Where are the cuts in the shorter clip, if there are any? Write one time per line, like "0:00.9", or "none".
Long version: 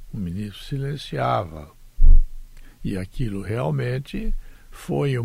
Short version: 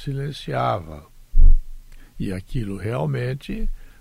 none